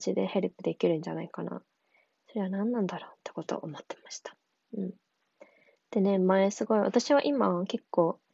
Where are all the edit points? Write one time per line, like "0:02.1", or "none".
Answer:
none